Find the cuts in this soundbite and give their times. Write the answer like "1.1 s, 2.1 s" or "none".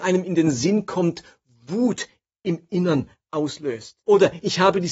4.0 s